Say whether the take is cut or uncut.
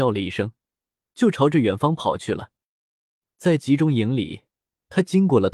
uncut